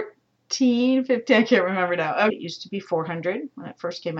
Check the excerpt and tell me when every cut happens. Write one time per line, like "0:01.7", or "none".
0:02.3